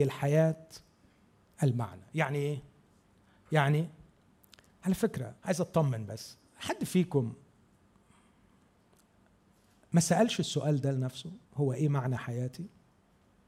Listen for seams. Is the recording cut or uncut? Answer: cut